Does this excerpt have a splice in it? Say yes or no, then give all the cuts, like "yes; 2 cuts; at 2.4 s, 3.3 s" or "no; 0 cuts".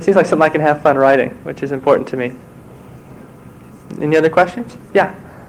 no; 0 cuts